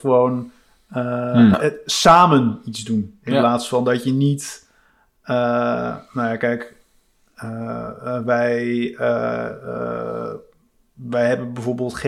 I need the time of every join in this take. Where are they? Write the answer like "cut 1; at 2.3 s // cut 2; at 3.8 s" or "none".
cut 1; at 1.5 s